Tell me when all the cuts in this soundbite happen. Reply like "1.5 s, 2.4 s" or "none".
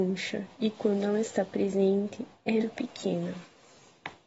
2.6 s

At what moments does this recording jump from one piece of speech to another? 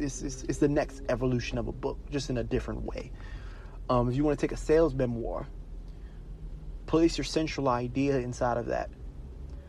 none

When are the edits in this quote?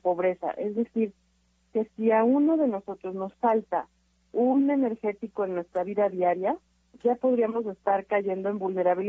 none

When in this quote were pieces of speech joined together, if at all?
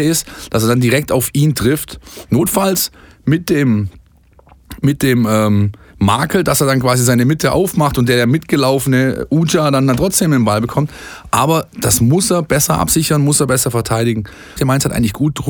14.6 s

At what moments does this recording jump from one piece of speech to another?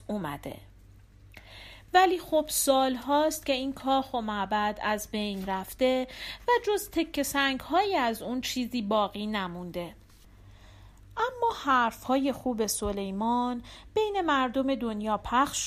1.9 s

